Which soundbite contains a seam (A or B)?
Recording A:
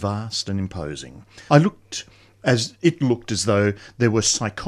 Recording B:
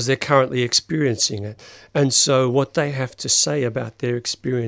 A